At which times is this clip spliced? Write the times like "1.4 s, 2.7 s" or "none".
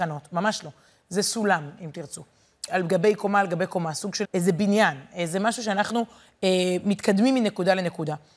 2.7 s, 4.2 s